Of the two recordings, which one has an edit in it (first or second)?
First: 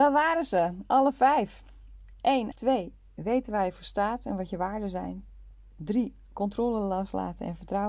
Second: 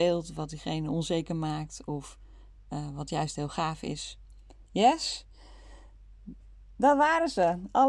first